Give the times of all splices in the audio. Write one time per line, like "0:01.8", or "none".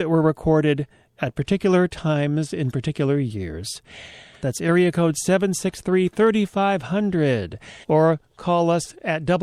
0:04.4
0:07.8